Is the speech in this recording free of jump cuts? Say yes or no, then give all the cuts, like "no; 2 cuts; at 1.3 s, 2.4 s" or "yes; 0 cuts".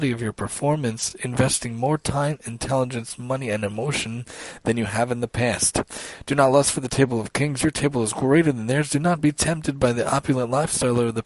yes; 0 cuts